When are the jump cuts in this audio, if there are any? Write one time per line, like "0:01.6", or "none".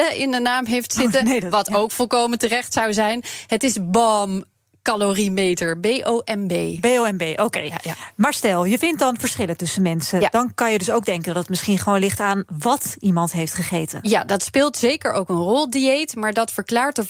none